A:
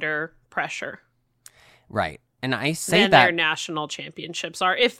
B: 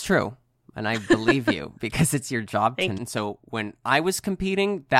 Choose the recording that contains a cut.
B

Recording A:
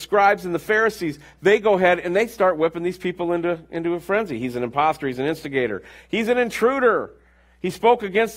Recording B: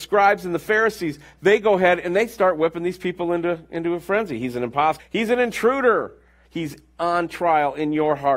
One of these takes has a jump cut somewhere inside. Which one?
B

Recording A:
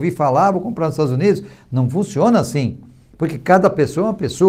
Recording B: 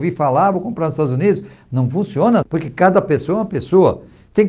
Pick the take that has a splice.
B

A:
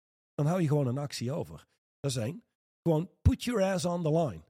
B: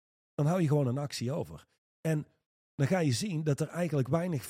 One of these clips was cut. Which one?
A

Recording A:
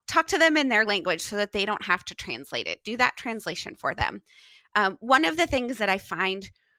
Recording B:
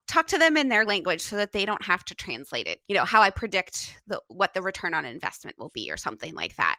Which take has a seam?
B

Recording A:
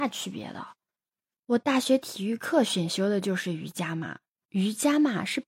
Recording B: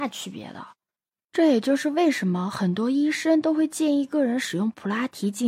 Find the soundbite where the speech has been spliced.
B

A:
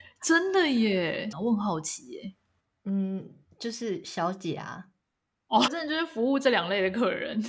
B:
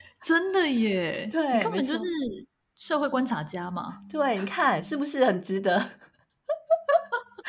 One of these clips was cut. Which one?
A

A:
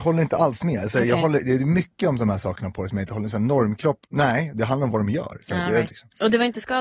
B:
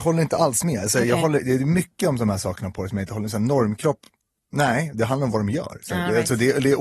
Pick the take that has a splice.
A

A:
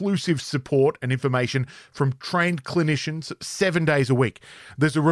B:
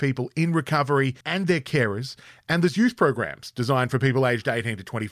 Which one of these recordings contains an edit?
B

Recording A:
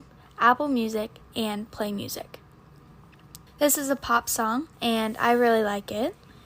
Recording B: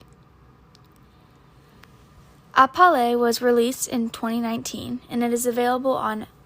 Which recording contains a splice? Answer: A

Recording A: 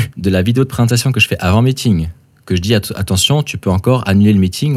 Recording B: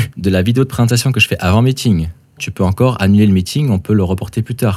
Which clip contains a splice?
B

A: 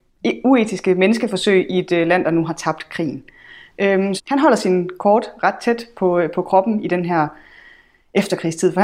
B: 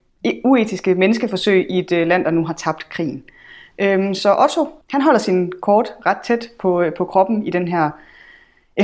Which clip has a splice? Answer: A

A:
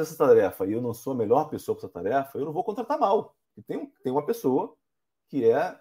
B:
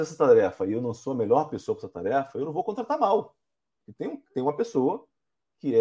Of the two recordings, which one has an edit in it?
A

